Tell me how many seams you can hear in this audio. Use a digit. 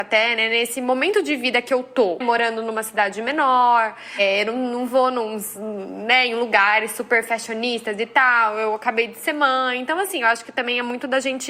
0